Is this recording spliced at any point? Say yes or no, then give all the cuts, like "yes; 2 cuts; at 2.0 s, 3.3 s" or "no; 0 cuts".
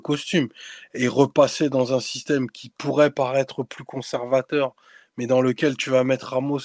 no; 0 cuts